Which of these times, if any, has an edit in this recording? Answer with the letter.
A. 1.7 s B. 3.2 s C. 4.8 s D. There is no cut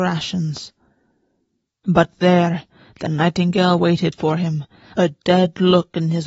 A